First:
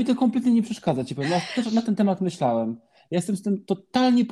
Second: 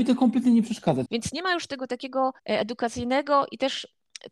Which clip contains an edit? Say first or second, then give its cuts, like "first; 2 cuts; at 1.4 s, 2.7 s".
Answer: second; 2 cuts; at 1.1 s, 2.4 s